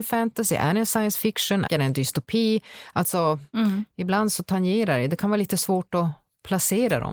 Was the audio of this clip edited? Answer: yes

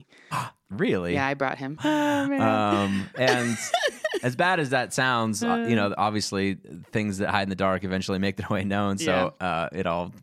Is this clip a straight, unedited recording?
no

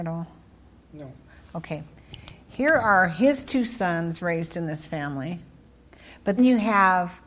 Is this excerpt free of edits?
no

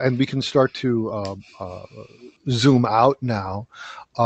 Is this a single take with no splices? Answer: no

